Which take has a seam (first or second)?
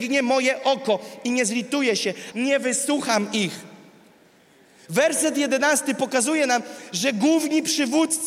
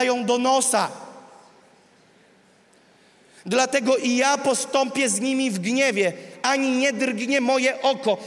first